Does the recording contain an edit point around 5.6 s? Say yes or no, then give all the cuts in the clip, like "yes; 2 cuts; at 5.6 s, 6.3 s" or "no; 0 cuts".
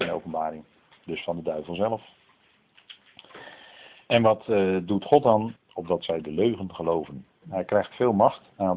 yes; 2 cuts; at 5.6 s, 7.4 s